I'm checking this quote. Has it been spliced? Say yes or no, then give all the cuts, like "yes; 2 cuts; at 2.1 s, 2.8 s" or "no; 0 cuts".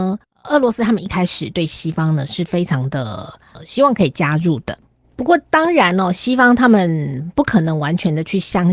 no; 0 cuts